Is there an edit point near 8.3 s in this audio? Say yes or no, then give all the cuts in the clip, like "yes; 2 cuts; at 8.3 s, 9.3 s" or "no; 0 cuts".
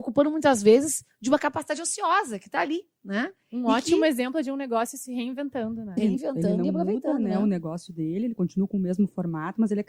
no; 1 cut; at 6.0 s